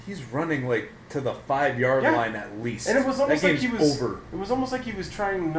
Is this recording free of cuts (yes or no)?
yes